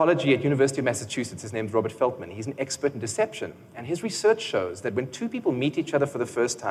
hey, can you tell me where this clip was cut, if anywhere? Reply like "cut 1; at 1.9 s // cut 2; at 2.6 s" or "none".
none